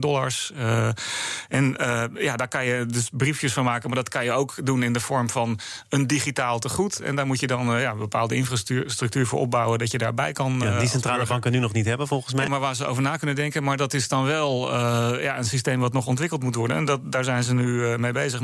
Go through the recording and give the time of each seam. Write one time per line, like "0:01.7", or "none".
0:12.5